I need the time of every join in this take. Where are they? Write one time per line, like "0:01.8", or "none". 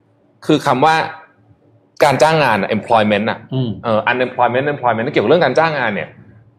none

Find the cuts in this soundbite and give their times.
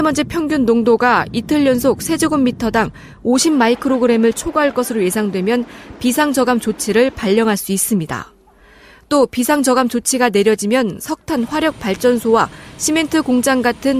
none

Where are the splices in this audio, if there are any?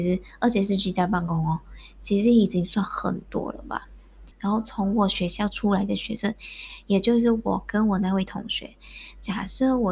0:04.3

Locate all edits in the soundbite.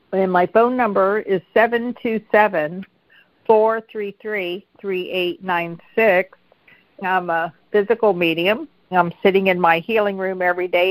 0:07.0
0:08.9

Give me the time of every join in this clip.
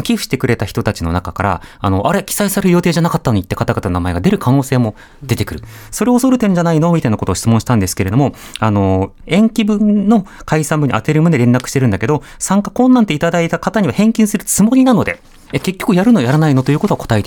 0:09.2
0:15.5

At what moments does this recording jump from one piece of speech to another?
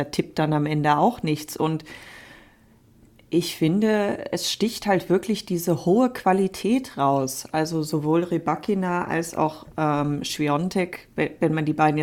none

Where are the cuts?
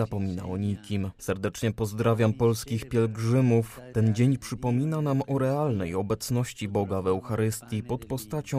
0:01.2
0:03.9

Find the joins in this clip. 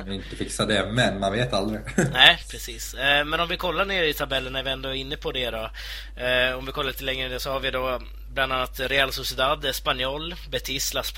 none

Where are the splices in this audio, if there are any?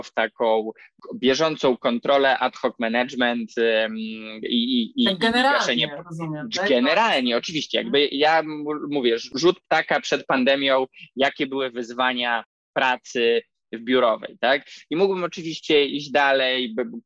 none

